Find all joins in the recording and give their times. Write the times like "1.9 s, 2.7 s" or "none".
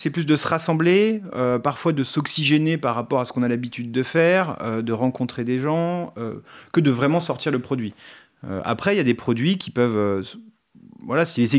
none